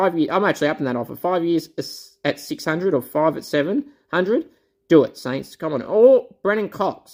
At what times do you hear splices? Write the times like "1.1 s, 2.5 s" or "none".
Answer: none

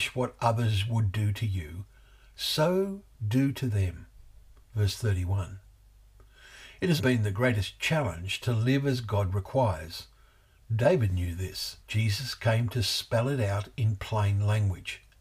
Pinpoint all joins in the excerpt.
7.0 s, 11.8 s

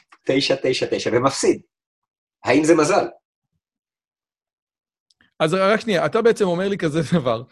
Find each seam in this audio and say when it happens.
none

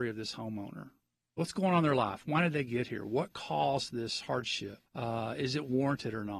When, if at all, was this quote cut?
4.9 s

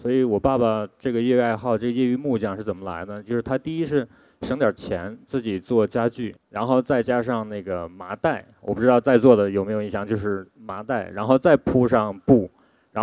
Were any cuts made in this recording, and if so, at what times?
6.4 s

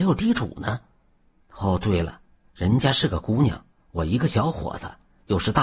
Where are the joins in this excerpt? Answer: 1.4 s

